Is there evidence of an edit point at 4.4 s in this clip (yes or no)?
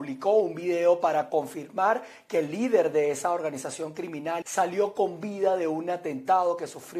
yes